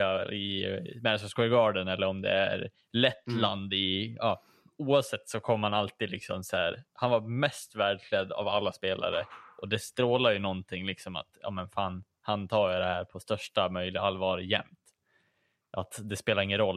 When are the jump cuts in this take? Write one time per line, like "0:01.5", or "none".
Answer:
none